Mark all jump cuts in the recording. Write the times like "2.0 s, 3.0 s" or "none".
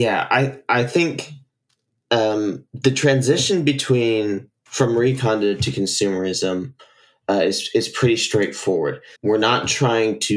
9.2 s